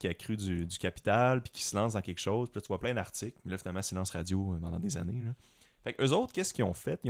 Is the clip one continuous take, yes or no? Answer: yes